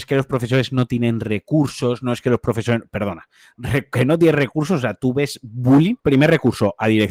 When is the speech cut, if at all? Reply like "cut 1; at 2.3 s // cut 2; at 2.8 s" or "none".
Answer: cut 1; at 6.0 s